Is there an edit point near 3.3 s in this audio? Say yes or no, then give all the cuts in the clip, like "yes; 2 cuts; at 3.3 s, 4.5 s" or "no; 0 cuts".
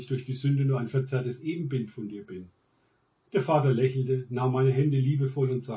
yes; 1 cut; at 3.3 s